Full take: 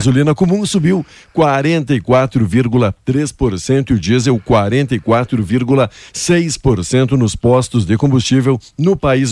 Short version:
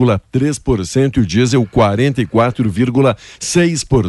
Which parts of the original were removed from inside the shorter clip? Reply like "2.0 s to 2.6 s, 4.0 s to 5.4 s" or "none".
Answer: none